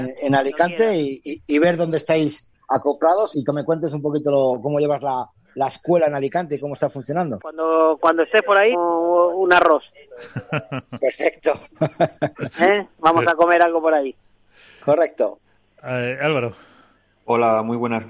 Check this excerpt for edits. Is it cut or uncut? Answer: cut